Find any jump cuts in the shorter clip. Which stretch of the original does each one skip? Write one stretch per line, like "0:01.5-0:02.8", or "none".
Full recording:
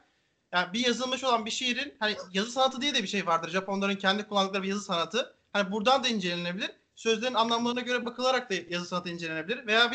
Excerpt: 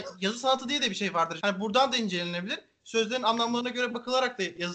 0:03.5-0:05.5